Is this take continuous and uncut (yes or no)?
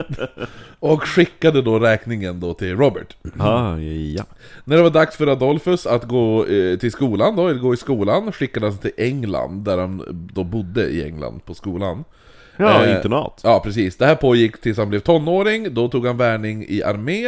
yes